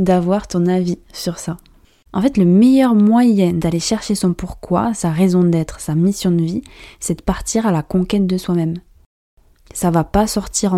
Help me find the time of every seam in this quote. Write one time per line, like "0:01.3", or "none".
0:02.1